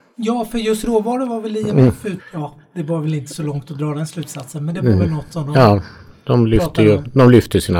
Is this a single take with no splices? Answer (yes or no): no